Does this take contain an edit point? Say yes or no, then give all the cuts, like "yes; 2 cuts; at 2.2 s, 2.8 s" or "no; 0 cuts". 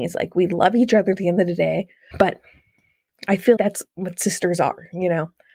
yes; 2 cuts; at 2.1 s, 3.6 s